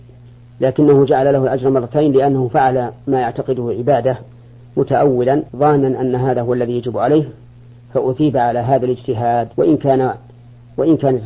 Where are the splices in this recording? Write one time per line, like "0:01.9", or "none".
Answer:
0:05.5
0:09.5